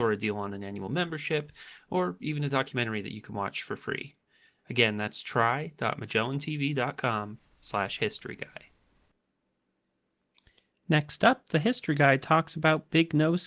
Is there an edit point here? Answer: no; 0 cuts

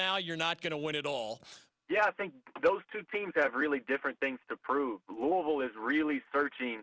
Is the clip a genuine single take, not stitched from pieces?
no; 1 cut; at 1.7 s

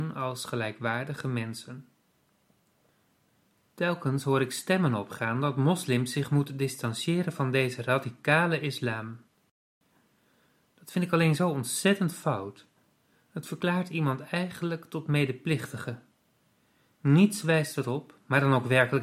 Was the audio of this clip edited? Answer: no; 0 cuts

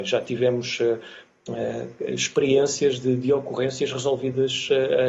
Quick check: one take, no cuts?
yes; 0 cuts

